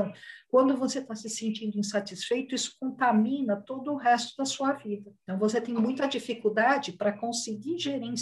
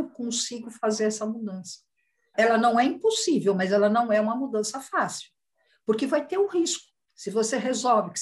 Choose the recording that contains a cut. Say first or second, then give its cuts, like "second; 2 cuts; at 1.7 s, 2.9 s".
second; 1 cut; at 2.3 s